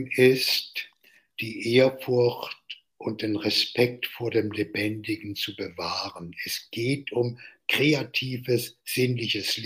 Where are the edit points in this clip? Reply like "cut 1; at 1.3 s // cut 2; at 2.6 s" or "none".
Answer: none

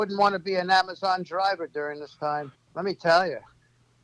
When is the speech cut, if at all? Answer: cut 1; at 2.6 s

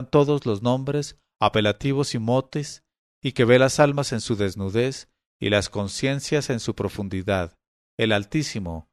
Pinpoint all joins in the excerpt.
none

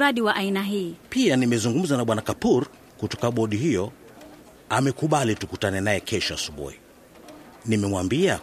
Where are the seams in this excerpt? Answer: cut 1; at 1.0 s

